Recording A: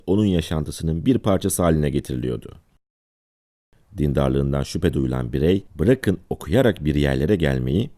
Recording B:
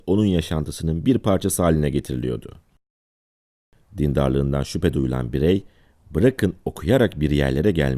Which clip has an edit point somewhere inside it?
A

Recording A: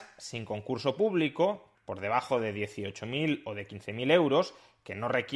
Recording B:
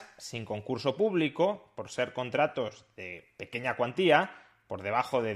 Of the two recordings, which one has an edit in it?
A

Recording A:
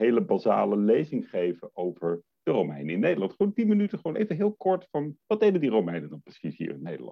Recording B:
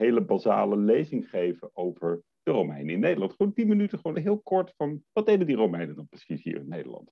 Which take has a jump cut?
B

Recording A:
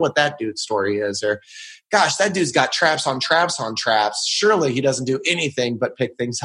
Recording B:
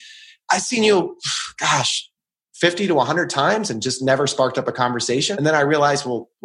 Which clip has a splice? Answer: B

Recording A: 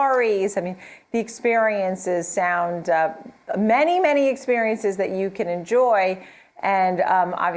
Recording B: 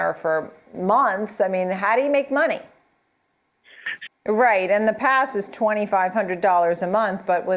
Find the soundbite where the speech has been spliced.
B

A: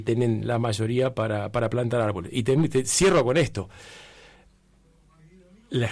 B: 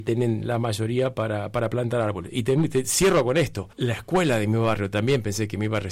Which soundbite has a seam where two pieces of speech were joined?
B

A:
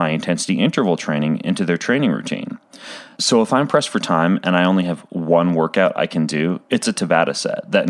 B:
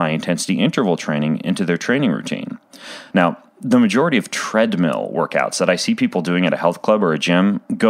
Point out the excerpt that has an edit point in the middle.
B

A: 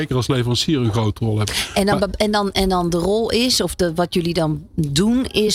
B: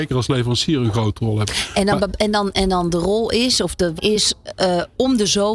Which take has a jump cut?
B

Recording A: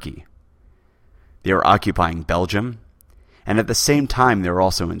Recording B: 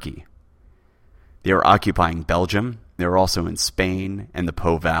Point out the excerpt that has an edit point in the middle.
B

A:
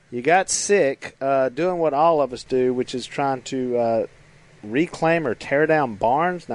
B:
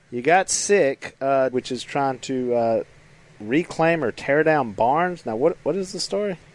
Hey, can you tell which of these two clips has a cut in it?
B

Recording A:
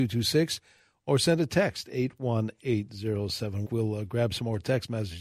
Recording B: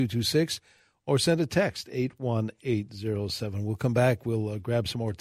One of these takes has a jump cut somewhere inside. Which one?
A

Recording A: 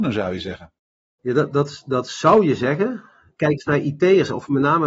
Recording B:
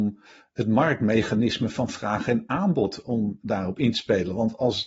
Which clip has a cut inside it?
A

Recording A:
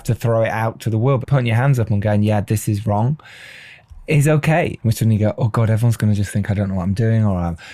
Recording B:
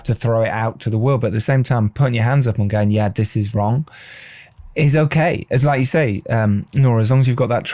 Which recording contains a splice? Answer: A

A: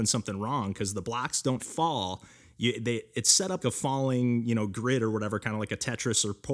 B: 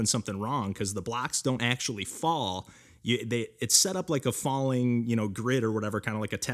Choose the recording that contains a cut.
A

